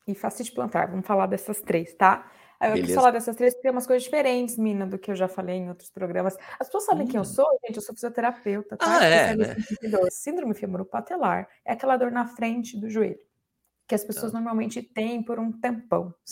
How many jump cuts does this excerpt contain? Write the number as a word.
one